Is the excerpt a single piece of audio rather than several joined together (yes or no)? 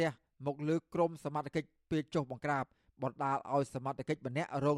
yes